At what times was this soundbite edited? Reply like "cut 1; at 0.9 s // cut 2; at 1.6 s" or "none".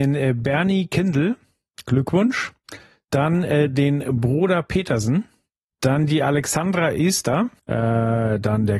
cut 1; at 7.6 s